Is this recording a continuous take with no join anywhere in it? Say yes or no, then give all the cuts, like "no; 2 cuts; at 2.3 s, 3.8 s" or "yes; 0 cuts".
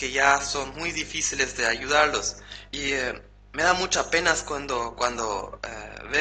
no; 1 cut; at 2.7 s